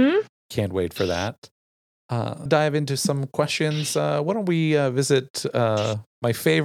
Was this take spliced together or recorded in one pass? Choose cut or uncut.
cut